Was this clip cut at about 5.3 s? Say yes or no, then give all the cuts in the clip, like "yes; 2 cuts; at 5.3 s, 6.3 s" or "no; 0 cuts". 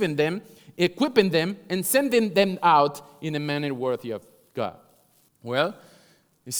yes; 1 cut; at 5.3 s